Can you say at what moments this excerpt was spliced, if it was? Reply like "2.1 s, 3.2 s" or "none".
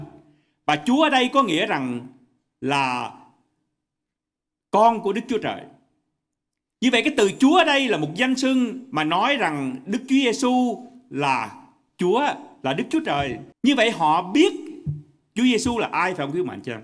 13.5 s